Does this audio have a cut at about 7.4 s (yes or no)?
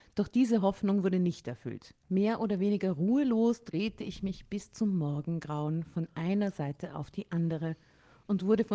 no